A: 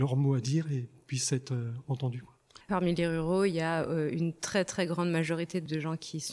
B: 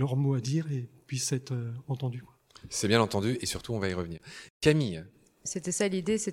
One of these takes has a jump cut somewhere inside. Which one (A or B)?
A